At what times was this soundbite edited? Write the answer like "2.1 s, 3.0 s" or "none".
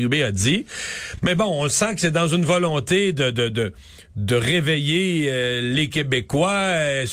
none